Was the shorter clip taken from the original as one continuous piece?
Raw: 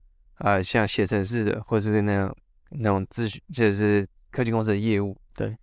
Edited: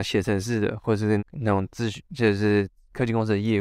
no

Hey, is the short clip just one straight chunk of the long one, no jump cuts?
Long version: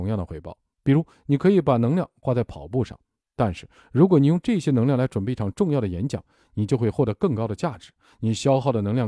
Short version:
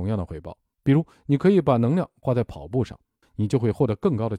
no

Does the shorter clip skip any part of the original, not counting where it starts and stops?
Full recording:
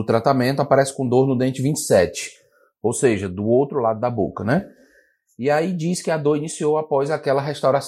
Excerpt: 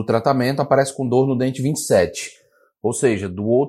no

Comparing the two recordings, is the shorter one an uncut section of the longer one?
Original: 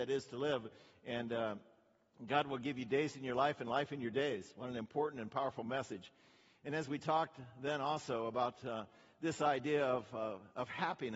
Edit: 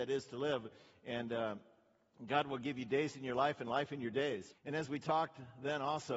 no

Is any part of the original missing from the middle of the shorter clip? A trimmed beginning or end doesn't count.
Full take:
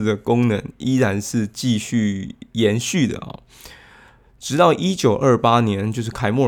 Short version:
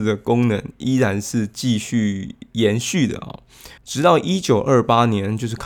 yes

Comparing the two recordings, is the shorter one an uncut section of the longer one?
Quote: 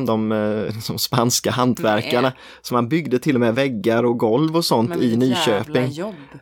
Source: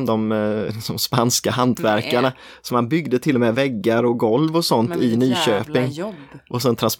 yes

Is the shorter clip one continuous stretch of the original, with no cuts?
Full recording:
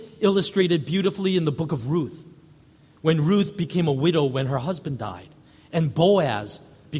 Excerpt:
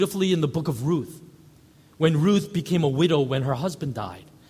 yes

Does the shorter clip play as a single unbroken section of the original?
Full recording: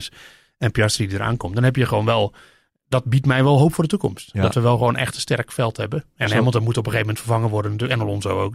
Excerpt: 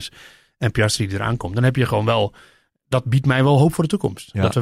yes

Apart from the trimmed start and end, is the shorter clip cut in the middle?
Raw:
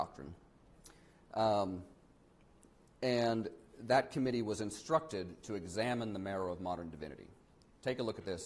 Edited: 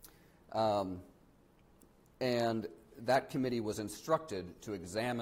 no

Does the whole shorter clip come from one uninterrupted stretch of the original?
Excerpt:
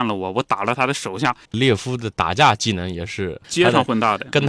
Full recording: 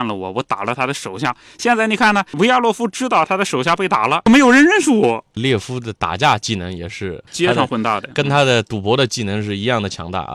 no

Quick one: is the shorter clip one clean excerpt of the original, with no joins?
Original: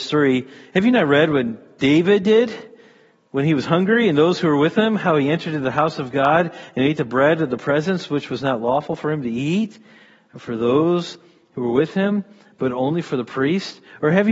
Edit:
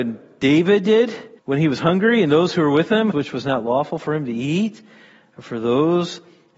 no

